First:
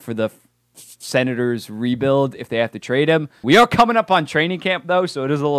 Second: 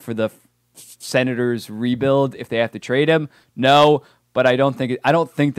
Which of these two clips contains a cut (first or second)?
first